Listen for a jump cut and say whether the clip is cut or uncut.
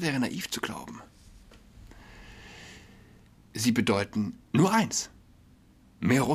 uncut